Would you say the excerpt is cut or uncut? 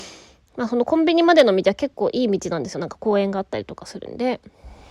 uncut